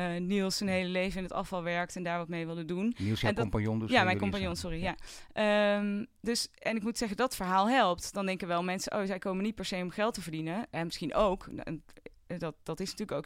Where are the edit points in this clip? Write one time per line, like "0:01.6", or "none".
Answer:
none